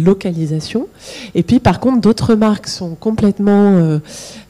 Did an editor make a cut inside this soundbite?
no; 0 cuts

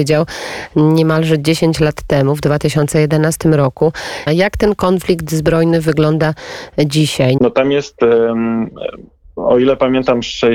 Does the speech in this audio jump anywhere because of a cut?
yes; 2 cuts; at 4.3 s, 7.4 s

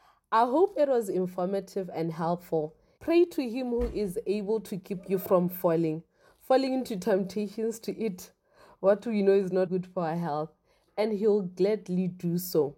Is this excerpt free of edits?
no; 2 cuts; at 3.0 s, 9.7 s

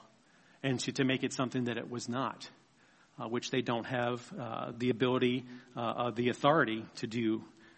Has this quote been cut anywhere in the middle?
no; 0 cuts

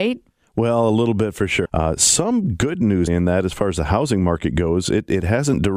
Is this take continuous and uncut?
no; 2 cuts; at 1.6 s, 3.1 s

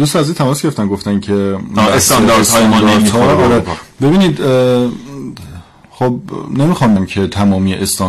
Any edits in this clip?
yes; 1 cut; at 7.0 s

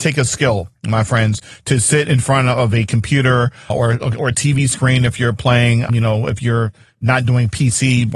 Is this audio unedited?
yes; 0 cuts

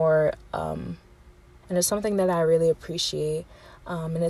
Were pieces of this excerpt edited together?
yes; 1 cut; at 1.6 s

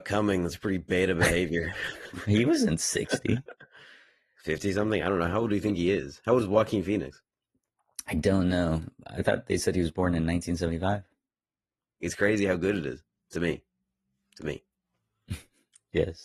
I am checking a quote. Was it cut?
yes; 1 cut; at 12.0 s

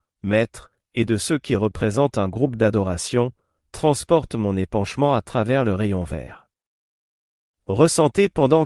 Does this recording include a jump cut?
no; 0 cuts

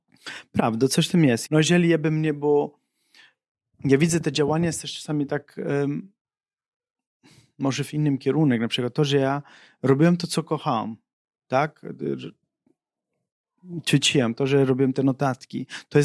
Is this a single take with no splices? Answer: no; 1 cut; at 1.5 s

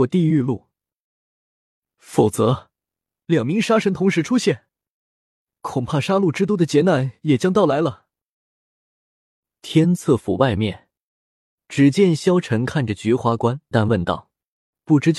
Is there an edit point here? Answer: yes; 1 cut; at 13.7 s

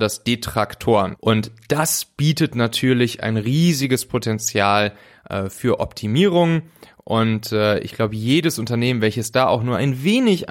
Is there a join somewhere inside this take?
yes; 1 cut; at 1.2 s

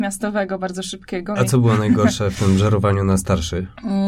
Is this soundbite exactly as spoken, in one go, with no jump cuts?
no; 1 cut; at 1.4 s

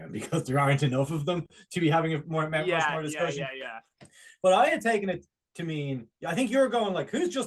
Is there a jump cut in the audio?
no; 0 cuts

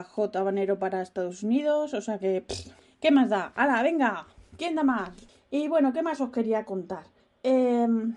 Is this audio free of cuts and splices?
yes; 0 cuts

